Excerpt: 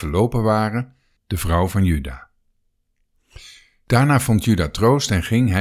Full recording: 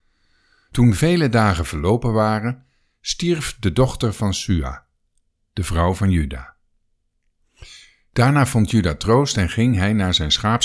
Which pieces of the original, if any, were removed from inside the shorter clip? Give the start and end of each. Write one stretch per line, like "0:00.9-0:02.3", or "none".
0:02.9-0:05.4